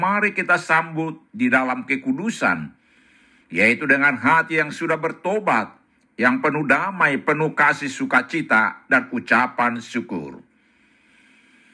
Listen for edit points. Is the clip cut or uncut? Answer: uncut